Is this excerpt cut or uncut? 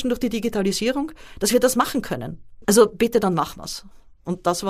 cut